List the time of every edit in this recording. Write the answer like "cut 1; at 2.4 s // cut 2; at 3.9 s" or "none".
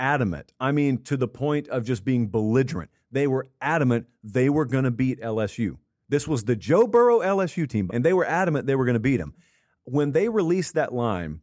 cut 1; at 7.9 s